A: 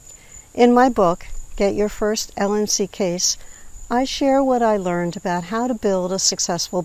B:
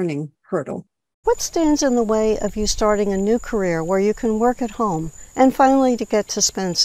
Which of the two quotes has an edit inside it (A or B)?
B